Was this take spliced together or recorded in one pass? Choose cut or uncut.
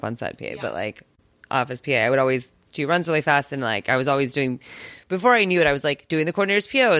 uncut